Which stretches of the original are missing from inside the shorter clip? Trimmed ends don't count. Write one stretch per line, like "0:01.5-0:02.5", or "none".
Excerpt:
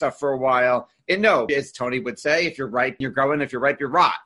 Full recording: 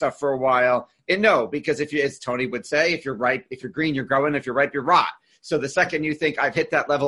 0:01.5-0:02.0
0:03.5-0:03.9